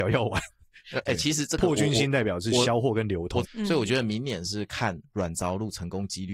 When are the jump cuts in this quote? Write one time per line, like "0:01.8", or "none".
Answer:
0:01.0
0:03.4